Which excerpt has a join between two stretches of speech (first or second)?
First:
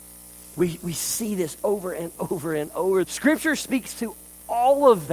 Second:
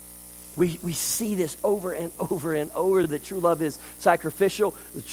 first